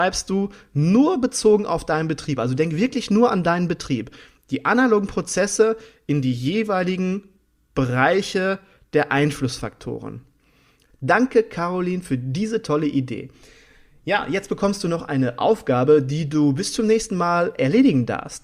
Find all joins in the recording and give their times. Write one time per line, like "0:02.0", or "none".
0:10.9